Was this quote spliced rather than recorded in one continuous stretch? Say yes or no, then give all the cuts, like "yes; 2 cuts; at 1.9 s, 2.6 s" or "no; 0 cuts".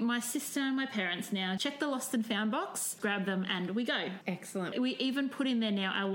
yes; 3 cuts; at 1.6 s, 3.0 s, 4.7 s